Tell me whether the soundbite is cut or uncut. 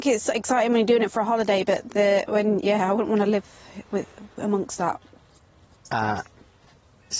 uncut